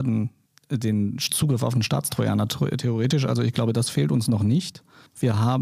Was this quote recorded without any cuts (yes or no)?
yes